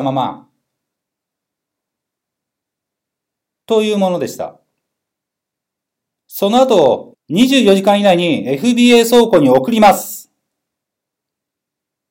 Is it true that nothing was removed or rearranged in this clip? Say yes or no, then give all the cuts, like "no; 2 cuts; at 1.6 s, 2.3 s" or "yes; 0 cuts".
no; 1 cut; at 7.1 s